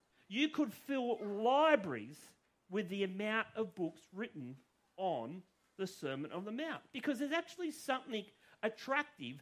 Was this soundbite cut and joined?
no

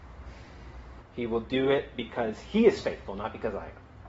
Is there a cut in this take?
yes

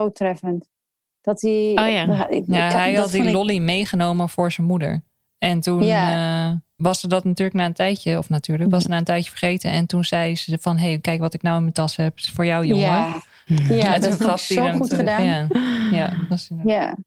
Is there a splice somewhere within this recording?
no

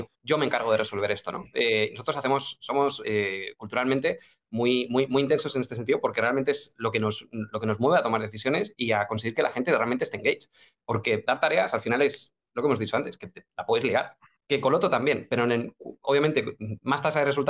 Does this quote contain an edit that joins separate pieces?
no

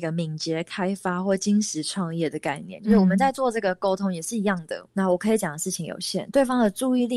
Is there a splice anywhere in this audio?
yes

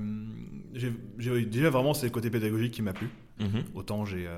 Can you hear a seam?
yes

